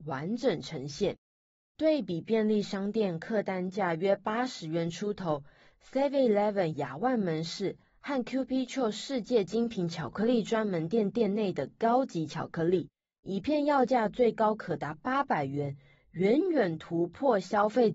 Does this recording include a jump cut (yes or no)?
no